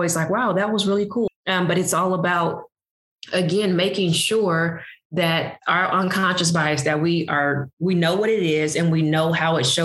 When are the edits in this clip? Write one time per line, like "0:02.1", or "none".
0:01.3